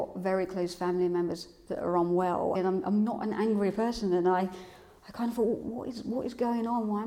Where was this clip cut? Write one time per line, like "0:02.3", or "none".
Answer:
0:02.5